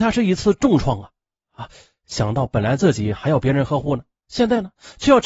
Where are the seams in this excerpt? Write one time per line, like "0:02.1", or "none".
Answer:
none